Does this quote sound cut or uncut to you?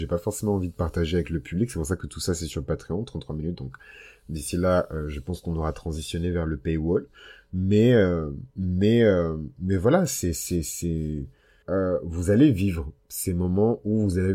cut